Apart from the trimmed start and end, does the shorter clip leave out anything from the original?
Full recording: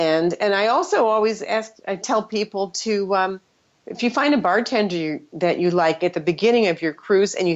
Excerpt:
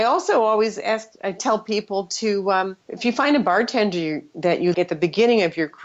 yes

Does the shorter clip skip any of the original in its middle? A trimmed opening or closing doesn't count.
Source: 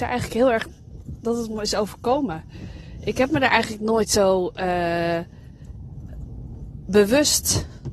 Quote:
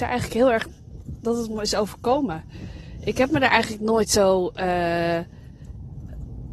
no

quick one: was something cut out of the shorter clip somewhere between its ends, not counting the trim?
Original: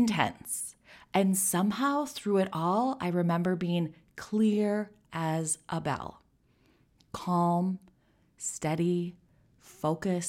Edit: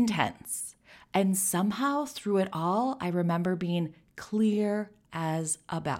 no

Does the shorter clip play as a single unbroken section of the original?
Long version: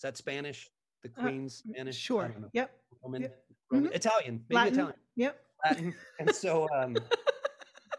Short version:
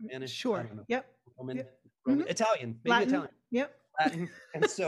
yes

